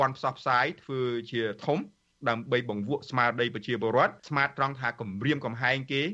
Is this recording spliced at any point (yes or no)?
yes